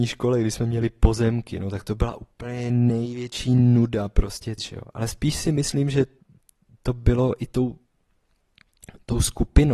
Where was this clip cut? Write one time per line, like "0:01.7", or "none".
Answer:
0:04.6